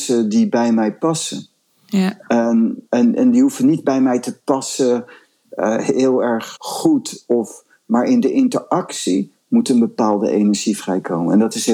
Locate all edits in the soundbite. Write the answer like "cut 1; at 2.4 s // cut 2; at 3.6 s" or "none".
cut 1; at 6.6 s